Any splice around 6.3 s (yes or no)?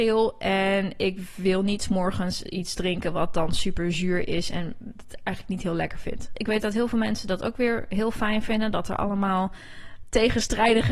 yes